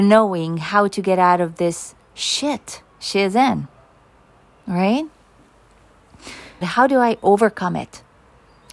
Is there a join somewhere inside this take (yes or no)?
yes